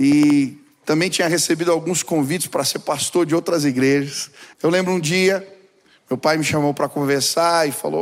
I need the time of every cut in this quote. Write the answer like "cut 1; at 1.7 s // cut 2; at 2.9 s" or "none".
cut 1; at 4.5 s